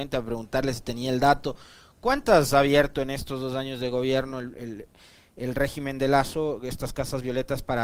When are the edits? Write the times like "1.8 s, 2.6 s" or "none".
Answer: 4.5 s